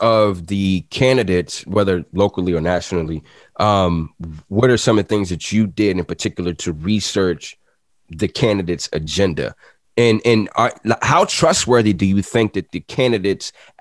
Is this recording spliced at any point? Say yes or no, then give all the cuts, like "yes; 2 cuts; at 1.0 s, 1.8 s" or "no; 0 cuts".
no; 0 cuts